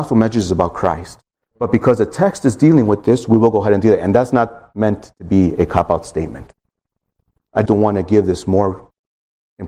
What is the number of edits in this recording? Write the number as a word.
one